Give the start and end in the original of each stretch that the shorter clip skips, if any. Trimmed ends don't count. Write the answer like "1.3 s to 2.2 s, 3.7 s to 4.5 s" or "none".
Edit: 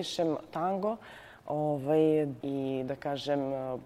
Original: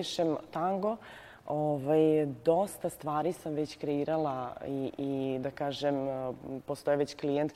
2.4 s to 4.9 s